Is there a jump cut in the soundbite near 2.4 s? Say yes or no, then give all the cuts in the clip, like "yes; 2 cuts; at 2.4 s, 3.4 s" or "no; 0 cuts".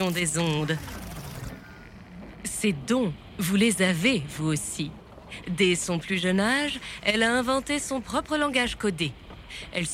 no; 1 cut; at 5.4 s